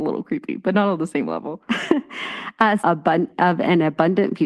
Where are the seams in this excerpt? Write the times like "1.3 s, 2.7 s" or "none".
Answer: 2.8 s

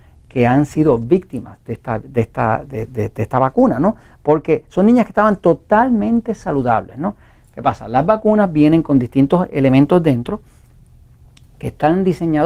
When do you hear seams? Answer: none

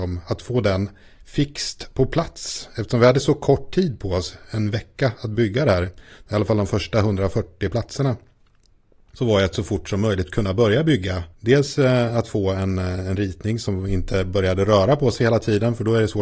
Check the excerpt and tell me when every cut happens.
11.3 s

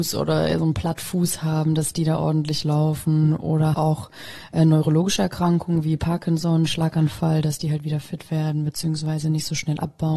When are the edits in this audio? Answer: 3.7 s

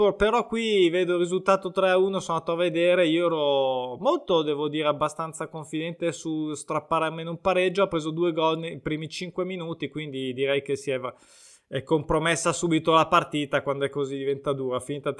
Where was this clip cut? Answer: none

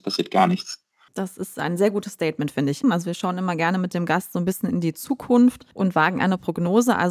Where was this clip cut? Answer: 2.8 s, 5.7 s

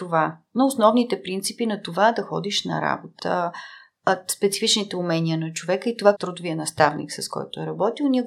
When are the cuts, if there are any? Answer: 3.2 s, 6.1 s

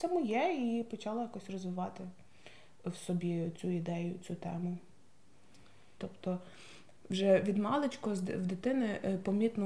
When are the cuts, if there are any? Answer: 3.6 s, 6.0 s

